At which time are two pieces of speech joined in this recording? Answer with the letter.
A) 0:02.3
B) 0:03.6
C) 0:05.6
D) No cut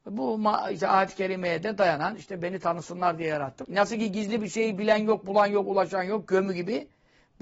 B